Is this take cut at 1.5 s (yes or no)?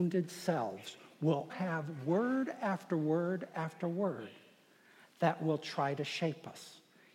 yes